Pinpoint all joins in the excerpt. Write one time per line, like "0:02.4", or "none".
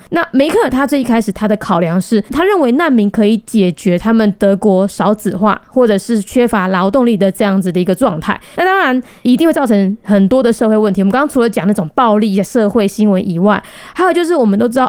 0:08.5